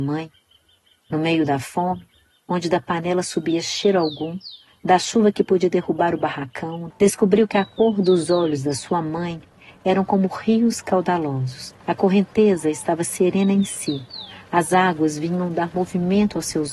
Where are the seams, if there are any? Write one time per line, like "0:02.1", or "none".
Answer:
0:06.9
0:11.8